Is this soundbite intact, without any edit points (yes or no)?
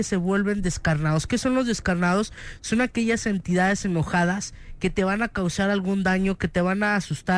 yes